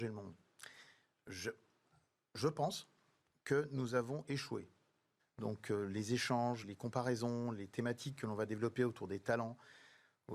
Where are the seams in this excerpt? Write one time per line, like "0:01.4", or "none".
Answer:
0:05.2
0:06.6